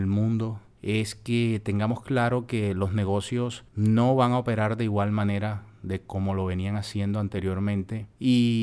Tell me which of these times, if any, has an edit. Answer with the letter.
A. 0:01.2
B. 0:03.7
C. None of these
B